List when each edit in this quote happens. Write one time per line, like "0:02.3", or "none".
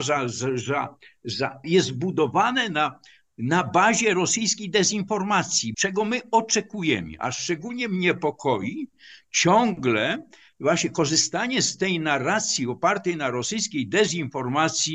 0:01.6
0:05.7

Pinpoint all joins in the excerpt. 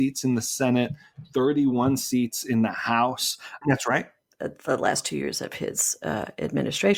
0:03.6

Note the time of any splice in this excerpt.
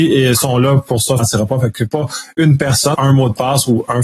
0:01.2
0:02.9

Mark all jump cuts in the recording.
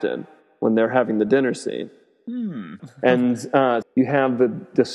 0:02.8
0:03.8

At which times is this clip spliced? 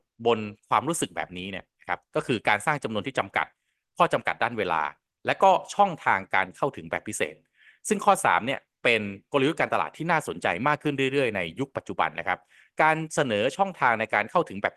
none

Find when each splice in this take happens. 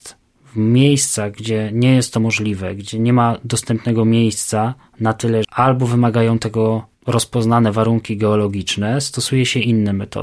0:05.4
0:06.9

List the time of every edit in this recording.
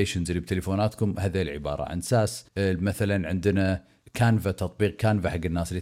0:02.5

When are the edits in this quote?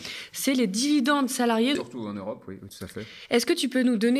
0:01.8

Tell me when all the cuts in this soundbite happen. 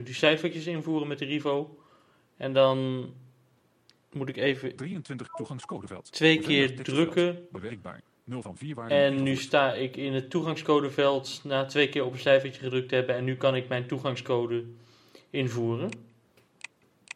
none

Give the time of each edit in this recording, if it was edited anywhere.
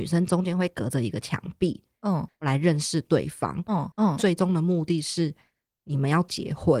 0:02.3
0:03.9

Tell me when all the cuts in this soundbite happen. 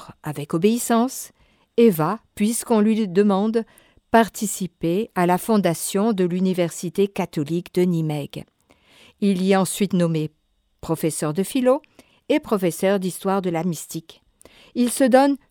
none

